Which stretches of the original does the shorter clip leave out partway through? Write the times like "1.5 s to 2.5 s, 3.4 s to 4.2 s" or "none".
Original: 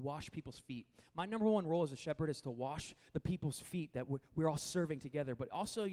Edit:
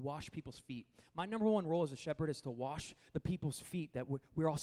none

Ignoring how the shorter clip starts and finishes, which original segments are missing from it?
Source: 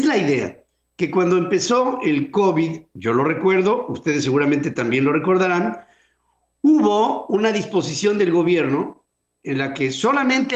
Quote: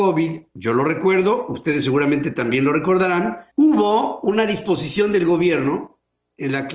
5.9 s to 6.5 s

